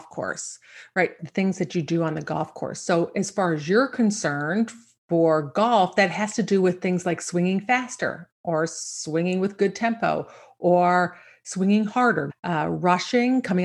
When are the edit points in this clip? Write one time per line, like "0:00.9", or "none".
0:01.2
0:12.3

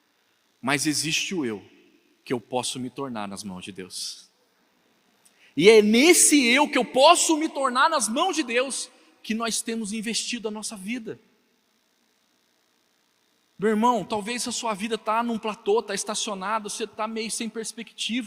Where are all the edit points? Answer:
none

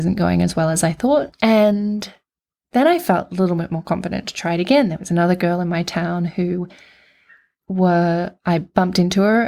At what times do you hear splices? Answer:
0:01.3

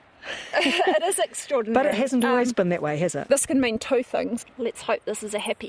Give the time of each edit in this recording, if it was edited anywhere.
0:03.3
0:04.4

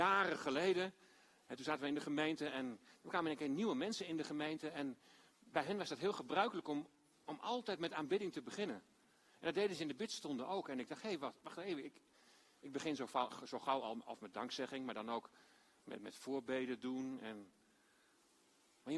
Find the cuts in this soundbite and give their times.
none

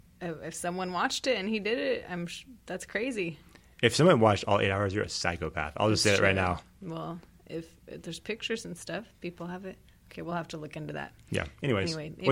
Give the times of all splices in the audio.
none

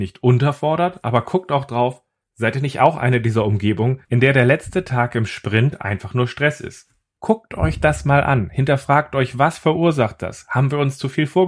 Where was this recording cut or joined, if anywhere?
none

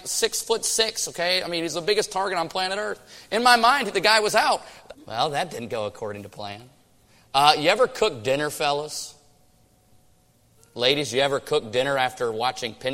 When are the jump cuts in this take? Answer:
0:04.9

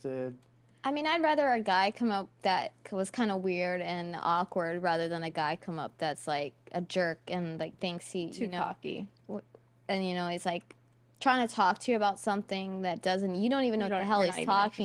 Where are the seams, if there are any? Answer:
none

